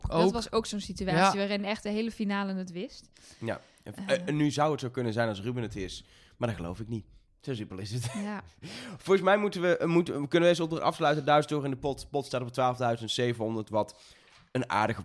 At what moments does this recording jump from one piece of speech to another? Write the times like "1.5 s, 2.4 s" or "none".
none